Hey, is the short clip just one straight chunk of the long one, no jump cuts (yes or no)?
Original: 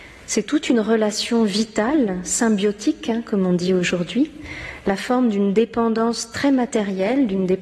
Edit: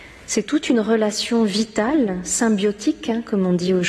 yes